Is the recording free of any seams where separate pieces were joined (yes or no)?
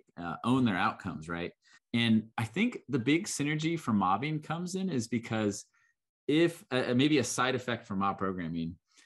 no